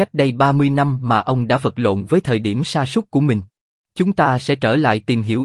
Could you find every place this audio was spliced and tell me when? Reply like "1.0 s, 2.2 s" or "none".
3.8 s